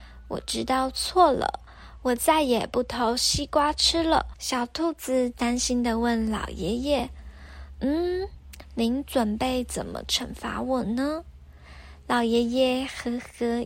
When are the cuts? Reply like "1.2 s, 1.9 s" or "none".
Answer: 4.3 s